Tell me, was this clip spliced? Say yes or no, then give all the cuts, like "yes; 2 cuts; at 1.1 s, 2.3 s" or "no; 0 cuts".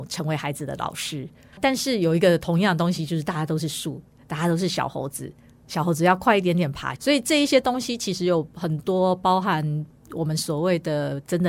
yes; 2 cuts; at 1.5 s, 7.0 s